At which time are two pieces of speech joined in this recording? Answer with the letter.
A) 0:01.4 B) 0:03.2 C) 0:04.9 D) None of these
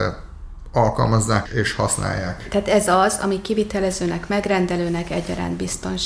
A